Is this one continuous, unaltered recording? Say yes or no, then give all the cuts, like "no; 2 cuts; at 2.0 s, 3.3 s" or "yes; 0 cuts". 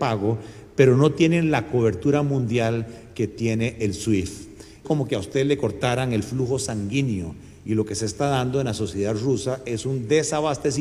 no; 1 cut; at 4.8 s